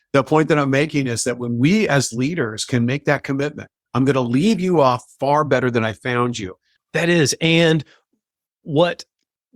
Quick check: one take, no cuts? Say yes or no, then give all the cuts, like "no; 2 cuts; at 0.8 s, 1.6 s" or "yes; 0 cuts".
no; 1 cut; at 6.8 s